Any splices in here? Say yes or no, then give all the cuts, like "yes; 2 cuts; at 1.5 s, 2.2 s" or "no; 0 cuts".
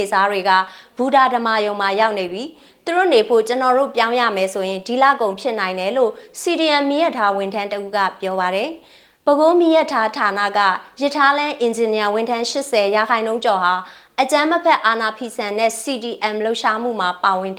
no; 0 cuts